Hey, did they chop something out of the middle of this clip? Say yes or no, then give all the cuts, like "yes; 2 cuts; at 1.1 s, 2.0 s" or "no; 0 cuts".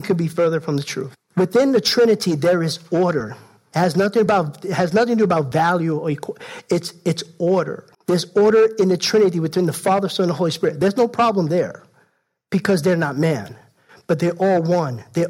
yes; 2 cuts; at 1.2 s, 7.9 s